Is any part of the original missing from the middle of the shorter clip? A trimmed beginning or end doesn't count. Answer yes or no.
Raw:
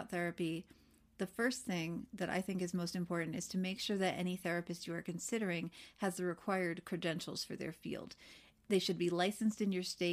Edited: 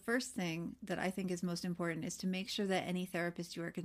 no